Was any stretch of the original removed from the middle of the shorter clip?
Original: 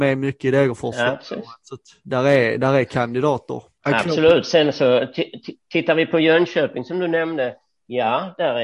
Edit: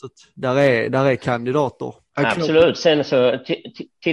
no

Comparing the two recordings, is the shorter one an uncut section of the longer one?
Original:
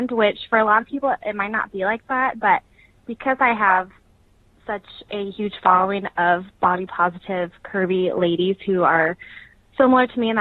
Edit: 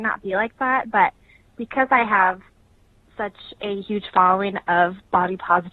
yes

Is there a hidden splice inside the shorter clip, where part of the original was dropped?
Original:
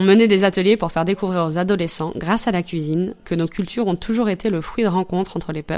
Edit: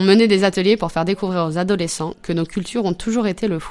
yes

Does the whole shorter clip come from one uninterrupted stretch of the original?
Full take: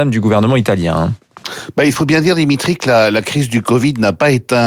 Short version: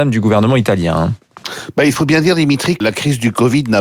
no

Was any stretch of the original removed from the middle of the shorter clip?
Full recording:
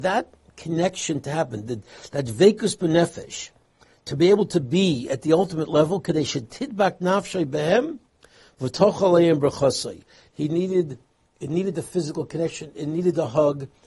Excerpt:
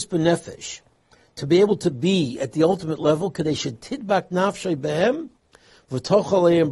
no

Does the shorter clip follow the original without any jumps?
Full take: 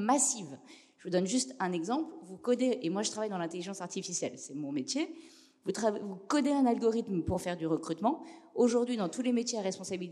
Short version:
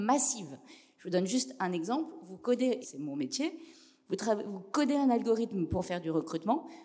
no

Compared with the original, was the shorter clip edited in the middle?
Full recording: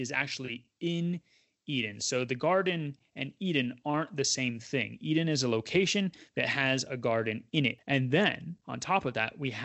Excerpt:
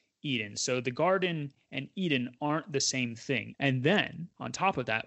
yes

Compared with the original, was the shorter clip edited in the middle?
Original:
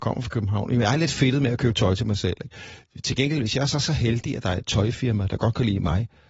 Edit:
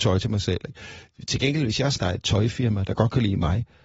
yes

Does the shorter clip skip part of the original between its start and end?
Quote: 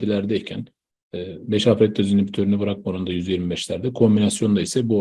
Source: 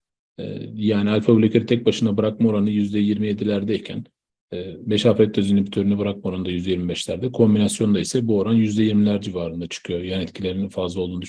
no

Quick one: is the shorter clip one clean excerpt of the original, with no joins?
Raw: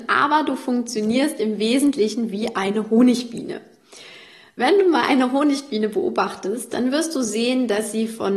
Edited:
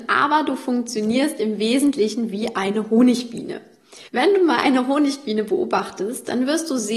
no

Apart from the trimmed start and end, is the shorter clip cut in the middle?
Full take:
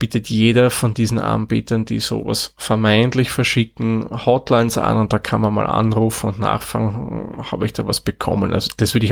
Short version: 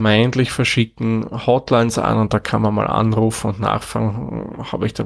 no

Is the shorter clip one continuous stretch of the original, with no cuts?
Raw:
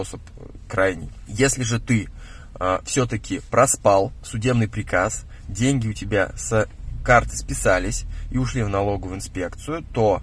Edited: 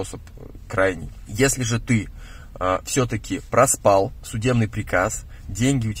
yes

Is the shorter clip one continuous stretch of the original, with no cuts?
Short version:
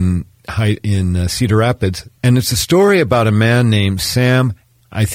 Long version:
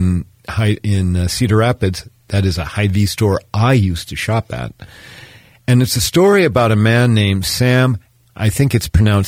no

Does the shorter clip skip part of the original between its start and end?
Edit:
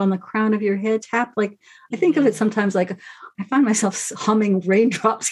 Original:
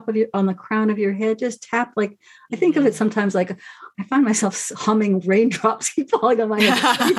yes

